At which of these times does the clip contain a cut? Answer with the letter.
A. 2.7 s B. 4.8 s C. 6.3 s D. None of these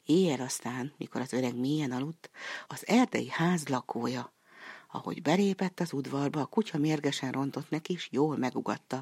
A